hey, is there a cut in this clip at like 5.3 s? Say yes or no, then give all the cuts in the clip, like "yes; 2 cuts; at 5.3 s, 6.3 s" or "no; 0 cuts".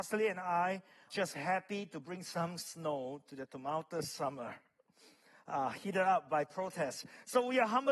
no; 1 cut; at 1.1 s